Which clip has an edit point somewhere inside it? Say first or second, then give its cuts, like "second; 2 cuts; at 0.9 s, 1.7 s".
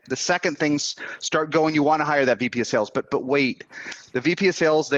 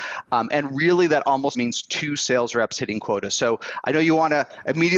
second; 1 cut; at 1.5 s